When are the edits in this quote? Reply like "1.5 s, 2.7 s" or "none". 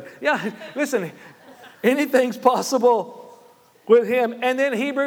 1.7 s